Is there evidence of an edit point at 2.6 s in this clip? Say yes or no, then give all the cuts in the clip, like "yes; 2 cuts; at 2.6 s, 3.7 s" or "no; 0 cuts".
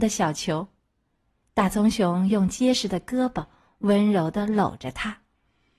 no; 1 cut; at 1.4 s